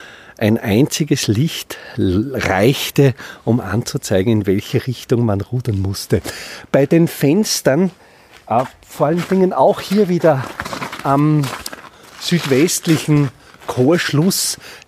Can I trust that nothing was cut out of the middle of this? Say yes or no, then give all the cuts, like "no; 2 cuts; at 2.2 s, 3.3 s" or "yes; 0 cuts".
yes; 0 cuts